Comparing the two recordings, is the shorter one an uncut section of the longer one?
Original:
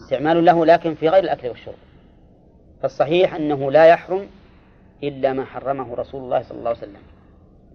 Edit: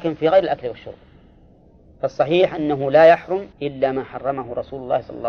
no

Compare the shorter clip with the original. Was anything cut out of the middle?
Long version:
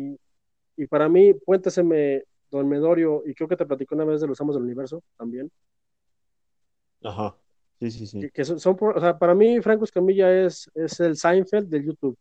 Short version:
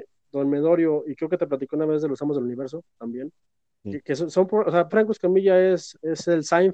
yes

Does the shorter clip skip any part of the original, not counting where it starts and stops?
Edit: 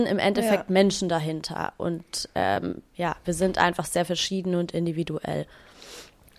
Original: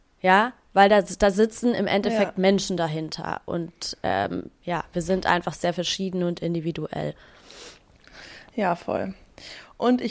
no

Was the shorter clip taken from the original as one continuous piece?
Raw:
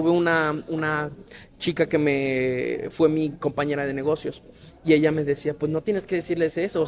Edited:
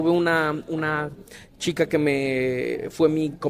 yes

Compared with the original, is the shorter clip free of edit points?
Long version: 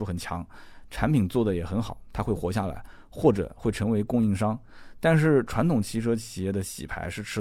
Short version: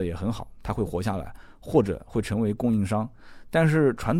yes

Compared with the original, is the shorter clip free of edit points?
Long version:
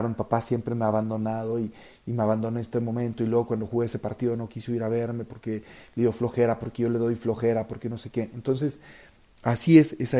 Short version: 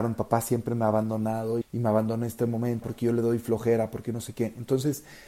no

